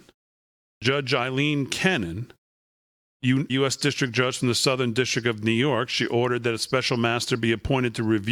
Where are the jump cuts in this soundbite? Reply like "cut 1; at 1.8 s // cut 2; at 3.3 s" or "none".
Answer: cut 1; at 3.5 s